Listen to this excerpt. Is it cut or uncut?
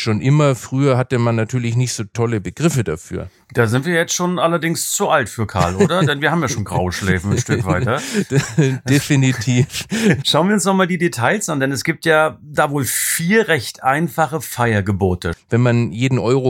cut